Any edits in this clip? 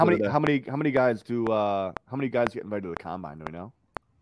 no; 0 cuts

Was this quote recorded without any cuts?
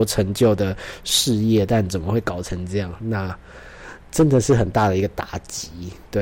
yes; 0 cuts

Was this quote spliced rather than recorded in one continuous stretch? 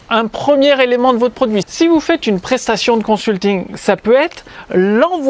yes; 1 cut; at 1.6 s

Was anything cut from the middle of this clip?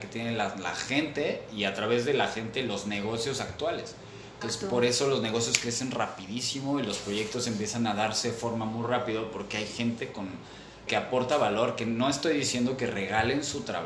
yes; 2 cuts; at 4.4 s, 10.9 s

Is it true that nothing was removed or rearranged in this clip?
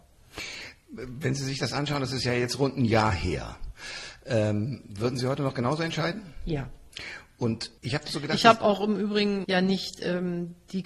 no; 2 cuts; at 7.8 s, 9.4 s

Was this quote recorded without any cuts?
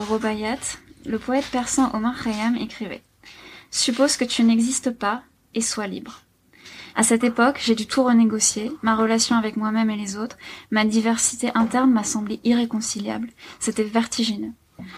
no; 1 cut; at 6.9 s

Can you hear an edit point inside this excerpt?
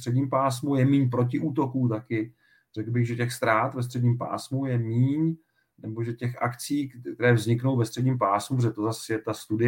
no; 0 cuts

